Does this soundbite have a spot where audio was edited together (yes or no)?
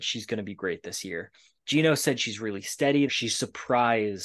yes